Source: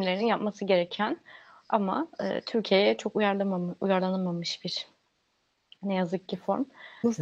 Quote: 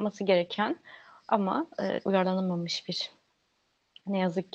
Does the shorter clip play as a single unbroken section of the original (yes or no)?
no